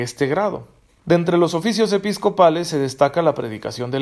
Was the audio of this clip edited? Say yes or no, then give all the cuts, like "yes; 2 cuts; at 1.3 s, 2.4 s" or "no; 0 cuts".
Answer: yes; 1 cut; at 1.0 s